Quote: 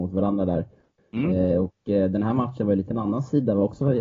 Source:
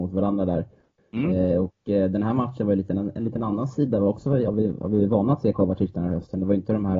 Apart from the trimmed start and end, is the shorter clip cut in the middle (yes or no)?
yes